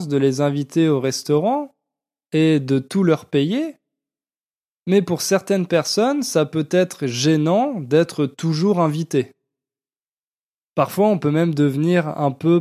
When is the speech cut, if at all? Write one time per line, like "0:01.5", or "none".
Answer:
0:10.6